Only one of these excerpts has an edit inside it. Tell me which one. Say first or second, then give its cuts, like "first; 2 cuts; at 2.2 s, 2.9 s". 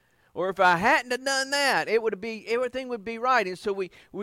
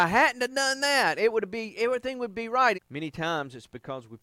second; 1 cut; at 2.7 s